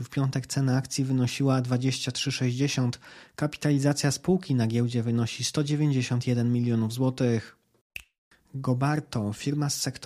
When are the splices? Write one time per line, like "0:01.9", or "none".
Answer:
none